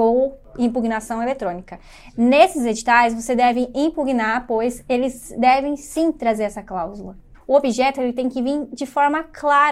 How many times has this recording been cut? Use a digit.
1